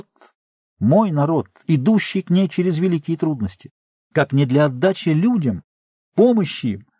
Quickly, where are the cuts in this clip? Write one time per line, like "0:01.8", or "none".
0:04.0